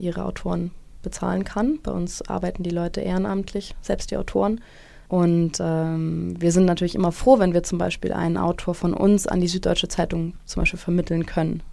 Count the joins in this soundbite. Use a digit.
1